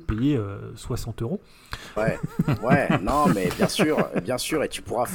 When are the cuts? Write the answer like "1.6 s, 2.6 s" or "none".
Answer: 2.0 s

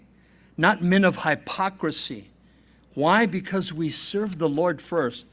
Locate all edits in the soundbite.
none

